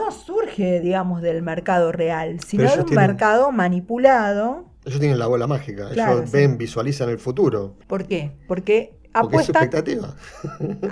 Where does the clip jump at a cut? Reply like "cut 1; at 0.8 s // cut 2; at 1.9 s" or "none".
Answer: cut 1; at 7.8 s